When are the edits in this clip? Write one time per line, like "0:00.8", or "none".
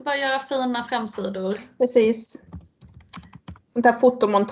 none